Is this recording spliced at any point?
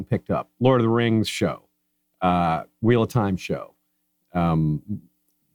no; 0 cuts

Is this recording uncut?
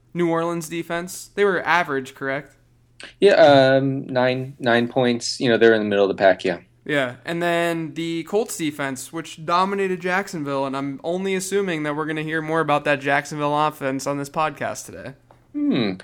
yes; 0 cuts

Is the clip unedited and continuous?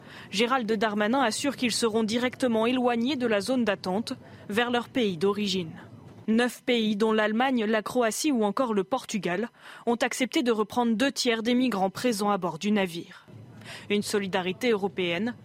no; 1 cut; at 6.2 s

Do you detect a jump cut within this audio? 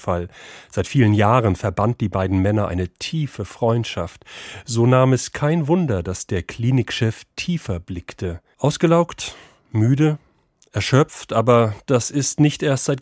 yes; 1 cut; at 8.5 s

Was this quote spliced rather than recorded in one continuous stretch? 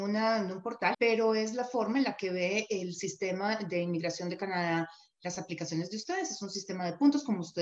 yes; 1 cut; at 0.9 s

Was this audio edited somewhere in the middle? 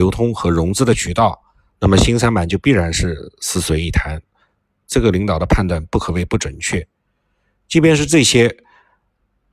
no; 0 cuts

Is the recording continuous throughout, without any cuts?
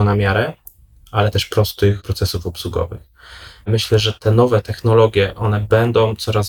yes; 0 cuts

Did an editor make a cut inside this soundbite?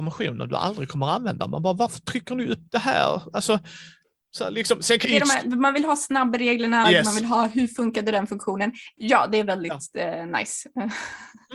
yes; 3 cuts; at 5.0 s, 6.8 s, 9.0 s

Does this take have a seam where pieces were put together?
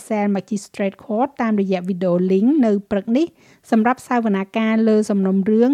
no; 0 cuts

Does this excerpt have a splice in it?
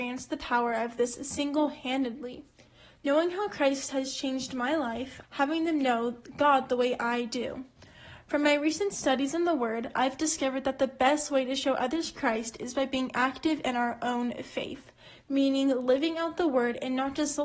yes; 2 cuts; at 3.0 s, 5.2 s

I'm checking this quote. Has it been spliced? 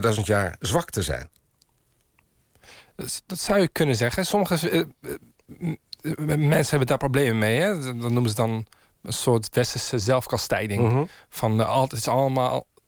no; 0 cuts

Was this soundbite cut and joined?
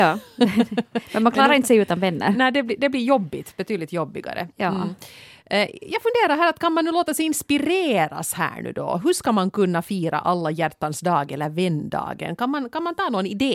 no; 0 cuts

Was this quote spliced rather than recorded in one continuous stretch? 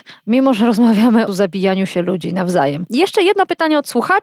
no; 0 cuts

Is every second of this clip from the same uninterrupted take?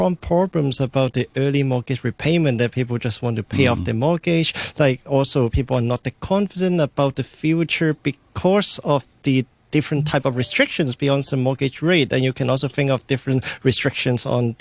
yes; 0 cuts

